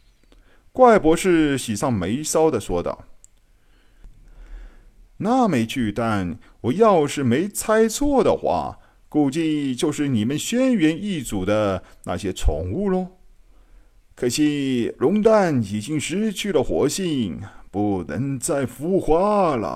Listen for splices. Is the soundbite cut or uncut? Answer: cut